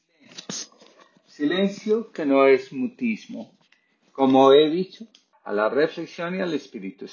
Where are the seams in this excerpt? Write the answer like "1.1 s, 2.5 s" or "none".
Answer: 5.3 s